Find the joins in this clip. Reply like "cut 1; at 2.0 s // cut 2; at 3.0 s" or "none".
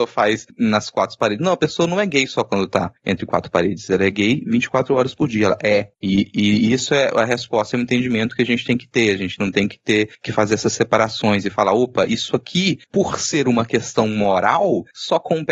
none